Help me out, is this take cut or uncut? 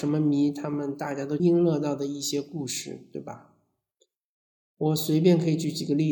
cut